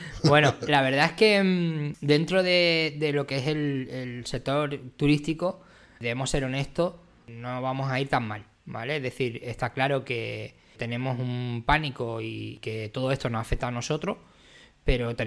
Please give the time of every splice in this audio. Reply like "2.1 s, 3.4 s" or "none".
none

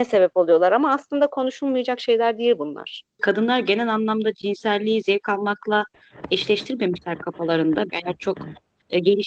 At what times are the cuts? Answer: 3.2 s, 7.9 s

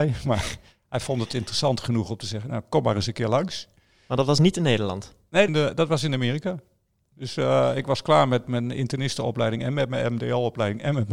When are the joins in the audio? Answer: 5.5 s

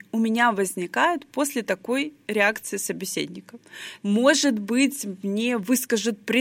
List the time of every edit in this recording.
4.0 s

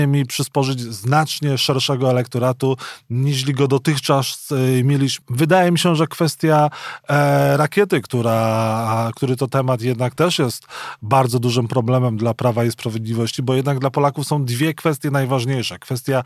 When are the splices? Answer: 5.2 s

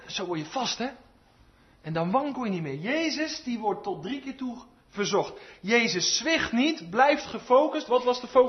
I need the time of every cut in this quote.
none

